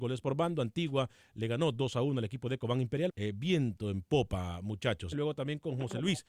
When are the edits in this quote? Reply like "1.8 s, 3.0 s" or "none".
3.1 s, 5.1 s

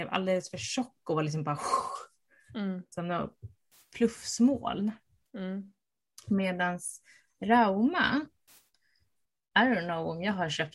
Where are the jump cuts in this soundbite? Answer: none

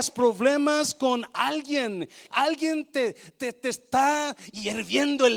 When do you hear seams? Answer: 2.3 s

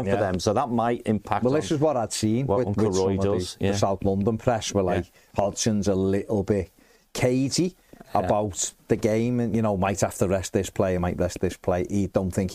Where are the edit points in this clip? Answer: none

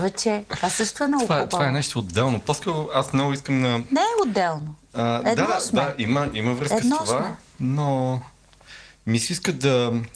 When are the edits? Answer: none

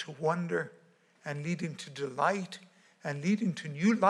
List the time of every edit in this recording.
1.2 s

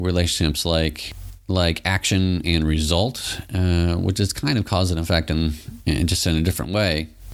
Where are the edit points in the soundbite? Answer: 5.8 s

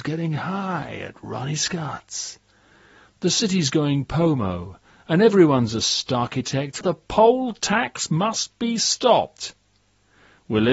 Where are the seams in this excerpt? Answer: 6.8 s

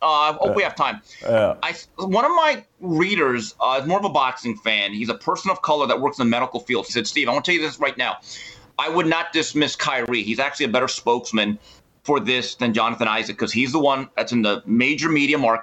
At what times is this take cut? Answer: 6.9 s

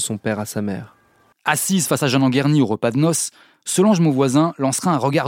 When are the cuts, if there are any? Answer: 1.3 s

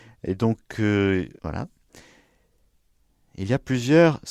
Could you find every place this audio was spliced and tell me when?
1.4 s

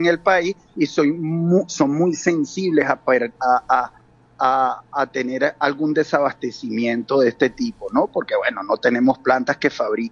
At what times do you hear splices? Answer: none

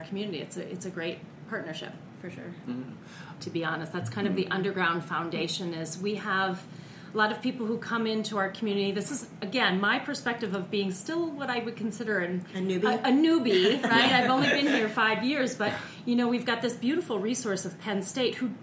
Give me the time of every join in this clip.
3.4 s

